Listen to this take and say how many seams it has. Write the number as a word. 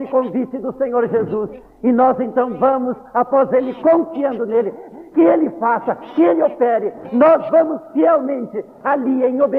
one